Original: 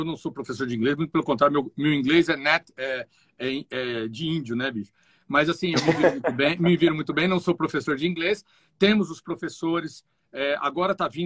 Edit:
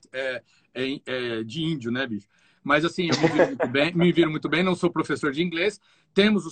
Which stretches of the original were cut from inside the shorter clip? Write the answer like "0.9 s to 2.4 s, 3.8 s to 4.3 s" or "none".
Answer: none